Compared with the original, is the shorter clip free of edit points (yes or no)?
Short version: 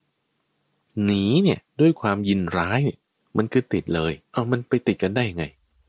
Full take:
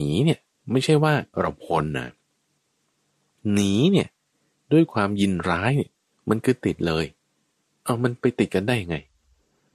no